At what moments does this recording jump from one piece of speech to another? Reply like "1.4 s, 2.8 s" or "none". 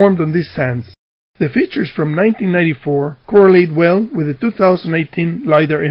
1.3 s